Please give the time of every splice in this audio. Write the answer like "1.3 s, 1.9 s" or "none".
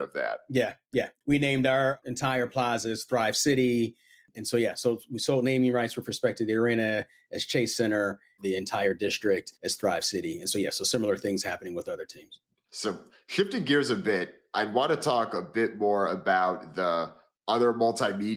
8.4 s, 9.6 s, 12.7 s